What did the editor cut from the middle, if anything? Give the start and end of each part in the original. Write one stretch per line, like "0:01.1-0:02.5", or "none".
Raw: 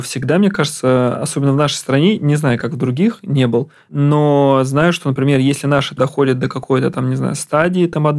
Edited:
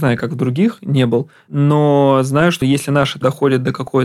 0:05.0-0:05.4